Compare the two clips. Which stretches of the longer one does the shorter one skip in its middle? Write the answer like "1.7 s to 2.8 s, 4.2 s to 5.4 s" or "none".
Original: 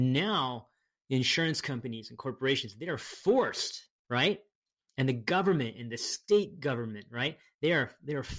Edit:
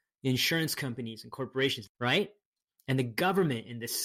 2.7 s to 4.0 s